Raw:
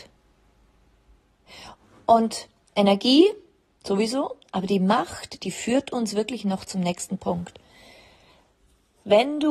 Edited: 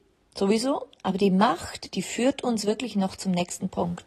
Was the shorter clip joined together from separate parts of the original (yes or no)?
no